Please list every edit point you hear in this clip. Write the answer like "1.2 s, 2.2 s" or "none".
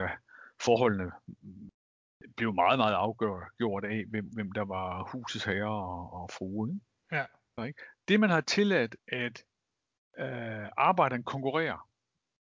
7.6 s, 9.0 s